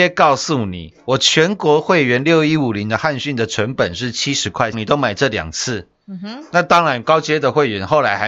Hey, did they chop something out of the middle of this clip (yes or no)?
yes